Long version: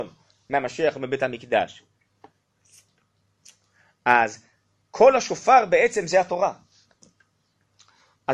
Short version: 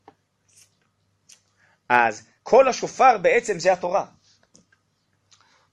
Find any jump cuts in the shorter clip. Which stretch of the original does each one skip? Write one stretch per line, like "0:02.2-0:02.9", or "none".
0:04.5-0:04.8